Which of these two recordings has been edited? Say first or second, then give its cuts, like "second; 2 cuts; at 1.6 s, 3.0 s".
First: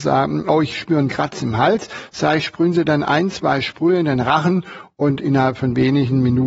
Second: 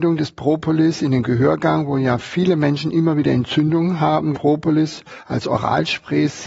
second; 1 cut; at 4.3 s